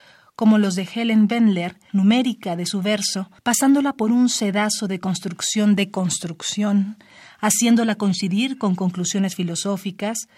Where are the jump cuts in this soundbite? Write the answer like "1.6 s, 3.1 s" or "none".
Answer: 1.9 s, 3.4 s